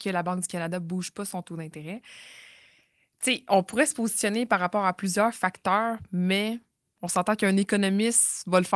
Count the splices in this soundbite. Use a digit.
0